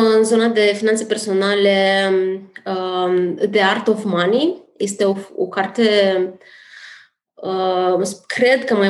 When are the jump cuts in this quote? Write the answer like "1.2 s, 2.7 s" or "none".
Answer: none